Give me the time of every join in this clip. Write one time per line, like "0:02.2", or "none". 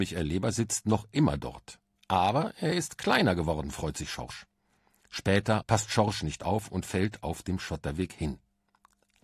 0:05.6